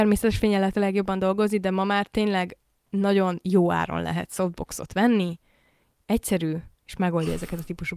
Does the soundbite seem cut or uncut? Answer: uncut